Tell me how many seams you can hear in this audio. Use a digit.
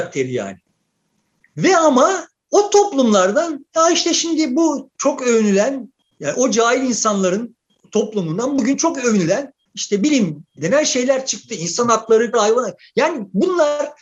1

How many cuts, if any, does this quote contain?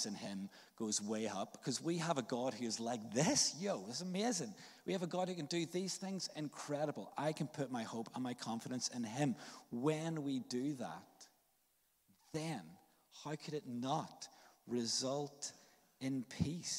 0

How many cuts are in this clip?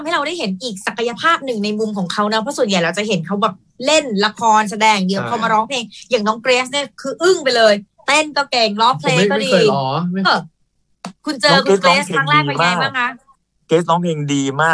1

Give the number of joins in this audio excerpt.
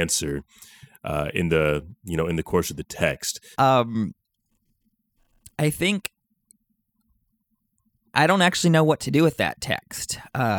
2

